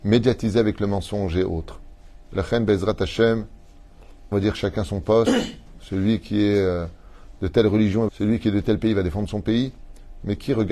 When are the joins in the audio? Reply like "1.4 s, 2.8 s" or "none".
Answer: 2.3 s, 4.3 s, 8.1 s